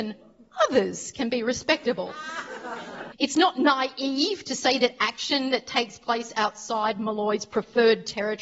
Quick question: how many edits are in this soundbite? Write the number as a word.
one